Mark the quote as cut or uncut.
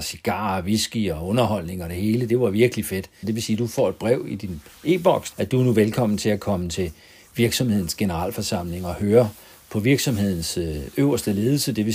cut